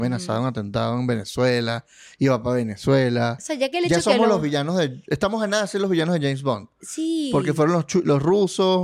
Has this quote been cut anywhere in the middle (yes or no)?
no